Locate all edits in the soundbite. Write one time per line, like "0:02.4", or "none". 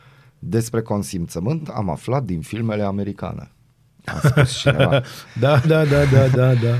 0:05.6